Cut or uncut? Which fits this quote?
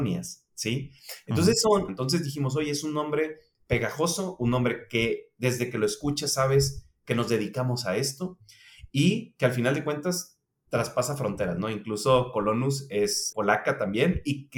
cut